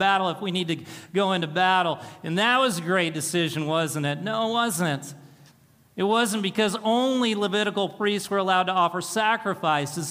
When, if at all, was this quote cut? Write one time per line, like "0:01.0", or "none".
none